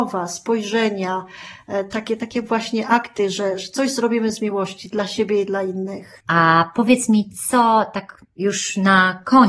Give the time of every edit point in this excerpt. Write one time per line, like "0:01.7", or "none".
0:06.2